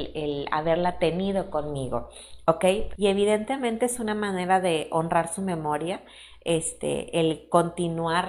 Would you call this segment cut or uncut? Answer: cut